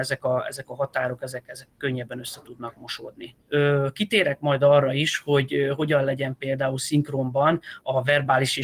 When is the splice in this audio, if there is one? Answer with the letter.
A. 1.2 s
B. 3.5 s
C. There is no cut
B